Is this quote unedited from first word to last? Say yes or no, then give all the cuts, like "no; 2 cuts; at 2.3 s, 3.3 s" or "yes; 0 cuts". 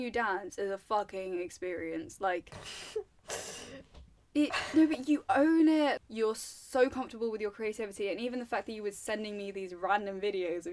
yes; 0 cuts